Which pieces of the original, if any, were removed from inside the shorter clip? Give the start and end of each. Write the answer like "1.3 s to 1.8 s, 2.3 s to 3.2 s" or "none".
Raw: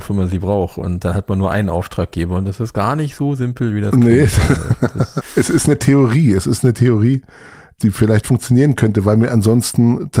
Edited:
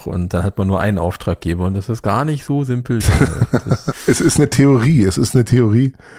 3.7 s to 4.3 s